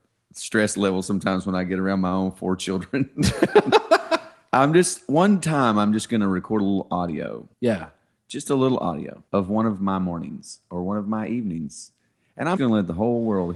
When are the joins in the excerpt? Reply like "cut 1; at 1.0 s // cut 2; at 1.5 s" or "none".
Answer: cut 1; at 7.5 s // cut 2; at 9.3 s // cut 3; at 12.6 s